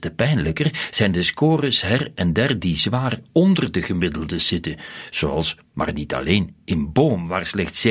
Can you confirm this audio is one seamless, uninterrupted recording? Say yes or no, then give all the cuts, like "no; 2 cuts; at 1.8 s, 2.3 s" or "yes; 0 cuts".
yes; 0 cuts